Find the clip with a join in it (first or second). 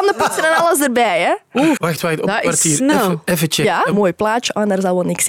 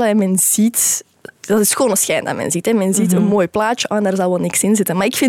first